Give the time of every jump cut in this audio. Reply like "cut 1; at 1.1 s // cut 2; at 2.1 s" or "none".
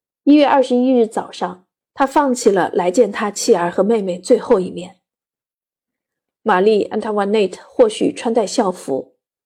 cut 1; at 1.8 s